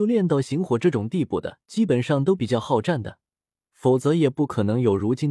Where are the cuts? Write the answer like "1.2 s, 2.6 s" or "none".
1.6 s